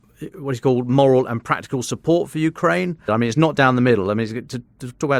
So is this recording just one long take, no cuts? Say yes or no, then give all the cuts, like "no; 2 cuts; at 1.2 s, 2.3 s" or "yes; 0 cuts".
no; 1 cut; at 3.1 s